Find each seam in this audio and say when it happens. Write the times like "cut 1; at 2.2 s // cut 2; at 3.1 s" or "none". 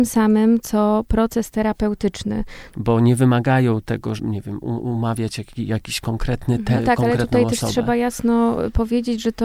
cut 1; at 2.7 s // cut 2; at 4.2 s // cut 3; at 6.7 s

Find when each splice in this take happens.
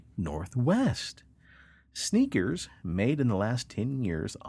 none

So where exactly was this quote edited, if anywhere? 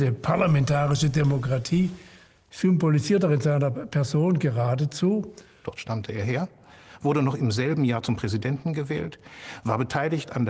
cut 1; at 5.6 s

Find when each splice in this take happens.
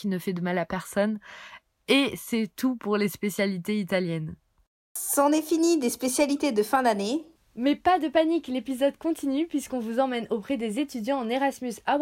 none

